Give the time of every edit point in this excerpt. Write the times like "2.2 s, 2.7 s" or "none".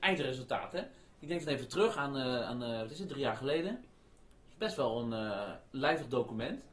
none